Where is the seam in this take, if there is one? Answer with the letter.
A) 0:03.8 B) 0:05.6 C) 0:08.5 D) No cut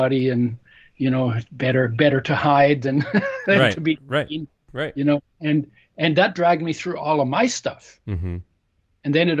D